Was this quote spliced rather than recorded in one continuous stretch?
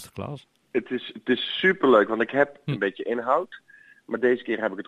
yes; 1 cut; at 2.7 s

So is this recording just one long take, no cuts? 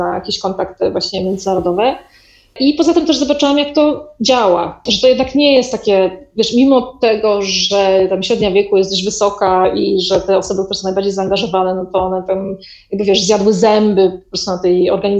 yes; 0 cuts

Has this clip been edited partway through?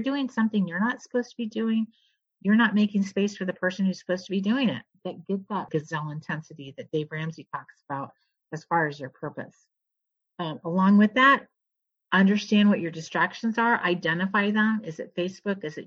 yes; 1 cut; at 4.9 s

